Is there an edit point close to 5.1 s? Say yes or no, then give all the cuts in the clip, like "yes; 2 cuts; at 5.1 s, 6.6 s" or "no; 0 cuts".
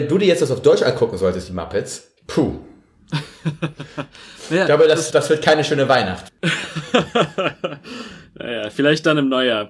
yes; 2 cuts; at 2.2 s, 5.1 s